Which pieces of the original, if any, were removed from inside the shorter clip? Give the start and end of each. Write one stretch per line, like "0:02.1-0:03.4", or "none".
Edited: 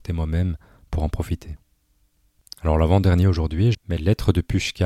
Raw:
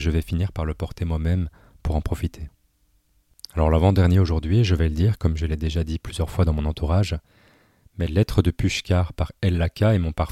0:04.7-0:07.8